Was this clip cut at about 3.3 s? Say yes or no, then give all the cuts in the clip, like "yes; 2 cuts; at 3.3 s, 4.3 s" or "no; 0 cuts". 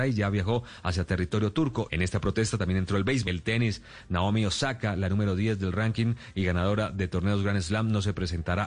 yes; 2 cuts; at 1.9 s, 3.3 s